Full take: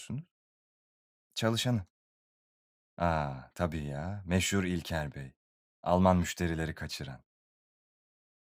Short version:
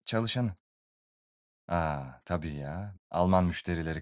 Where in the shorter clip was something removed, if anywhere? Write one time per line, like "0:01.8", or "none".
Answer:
0:02.9